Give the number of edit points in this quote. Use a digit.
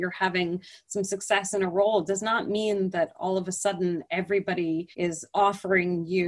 1